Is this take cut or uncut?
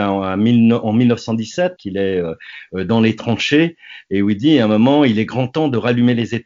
cut